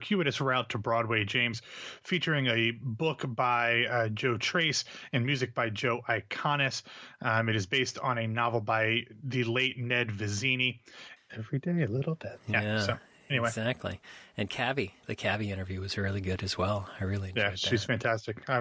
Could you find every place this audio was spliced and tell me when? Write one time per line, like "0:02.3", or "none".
0:11.2
0:15.0